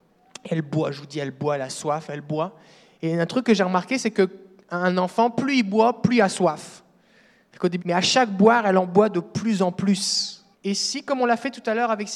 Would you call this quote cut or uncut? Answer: cut